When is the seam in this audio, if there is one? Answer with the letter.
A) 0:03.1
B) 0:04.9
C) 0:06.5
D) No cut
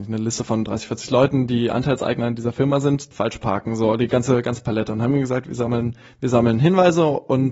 A